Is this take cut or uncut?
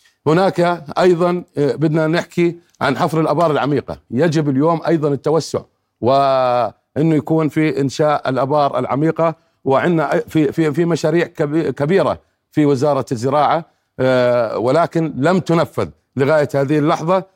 cut